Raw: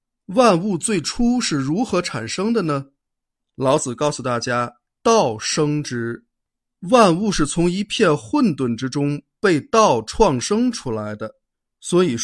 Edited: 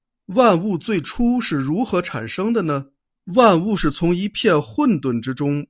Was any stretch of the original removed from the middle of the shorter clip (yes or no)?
yes